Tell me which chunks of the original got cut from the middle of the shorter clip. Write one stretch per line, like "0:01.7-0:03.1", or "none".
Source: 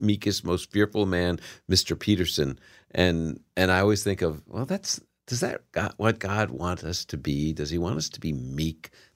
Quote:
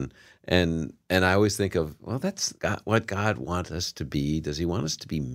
0:05.0-0:05.7